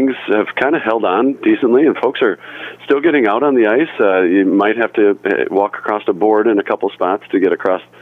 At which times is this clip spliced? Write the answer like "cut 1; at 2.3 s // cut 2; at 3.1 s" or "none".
none